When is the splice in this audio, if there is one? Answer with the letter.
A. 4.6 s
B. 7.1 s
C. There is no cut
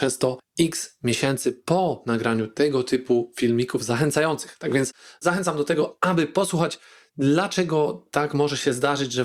C